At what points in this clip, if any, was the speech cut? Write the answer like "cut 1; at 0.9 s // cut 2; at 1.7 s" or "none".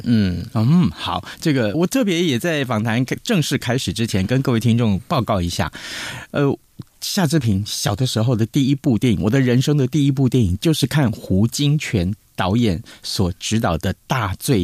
cut 1; at 1.7 s